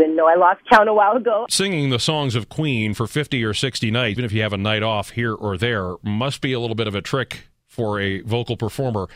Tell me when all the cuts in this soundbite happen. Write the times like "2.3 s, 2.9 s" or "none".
1.5 s, 4.2 s

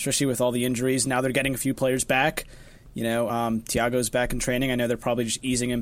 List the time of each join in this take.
none

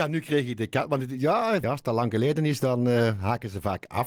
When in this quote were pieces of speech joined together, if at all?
1.6 s

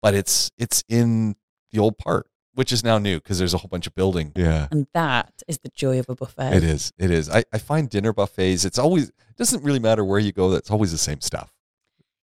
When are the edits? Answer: 4.4 s

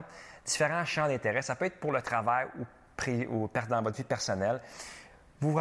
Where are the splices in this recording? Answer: none

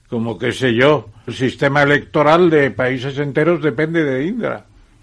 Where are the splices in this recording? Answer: 1.3 s

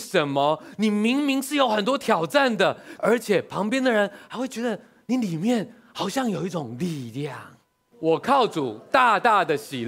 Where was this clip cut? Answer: 3.0 s, 7.9 s

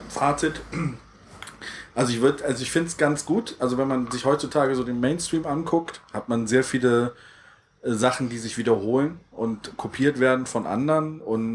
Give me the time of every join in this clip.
none

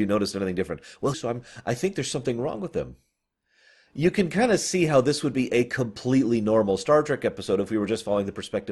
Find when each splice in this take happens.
1.1 s

